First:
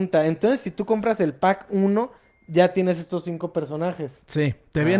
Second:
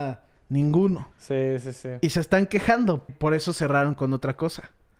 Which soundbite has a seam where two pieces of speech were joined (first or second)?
second